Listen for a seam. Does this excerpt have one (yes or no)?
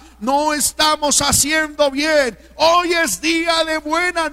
no